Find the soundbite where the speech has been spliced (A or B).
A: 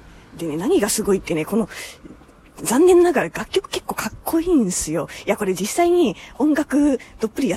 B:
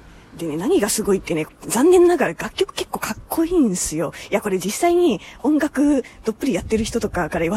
B